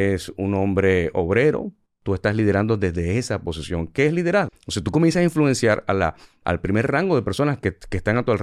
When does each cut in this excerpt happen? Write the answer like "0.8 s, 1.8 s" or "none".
4.5 s